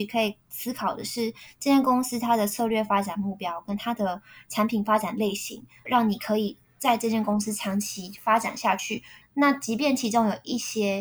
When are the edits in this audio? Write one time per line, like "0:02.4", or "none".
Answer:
0:05.9
0:09.2